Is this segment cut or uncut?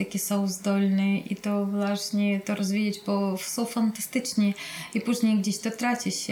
cut